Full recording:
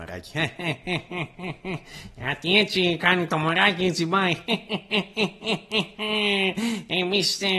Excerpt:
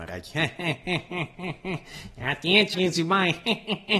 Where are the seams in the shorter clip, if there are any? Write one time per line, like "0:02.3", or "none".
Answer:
0:02.7